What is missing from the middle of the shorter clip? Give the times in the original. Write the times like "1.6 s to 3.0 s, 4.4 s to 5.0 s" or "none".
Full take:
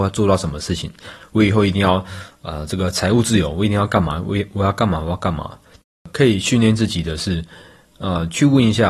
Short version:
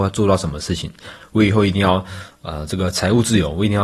none